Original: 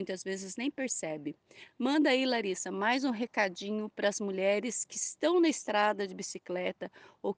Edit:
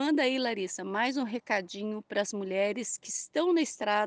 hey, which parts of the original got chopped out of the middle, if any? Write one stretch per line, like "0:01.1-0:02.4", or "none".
none